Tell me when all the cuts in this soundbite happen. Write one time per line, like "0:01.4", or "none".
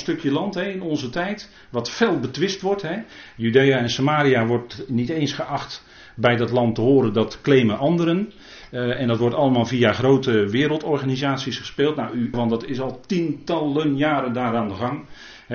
0:12.3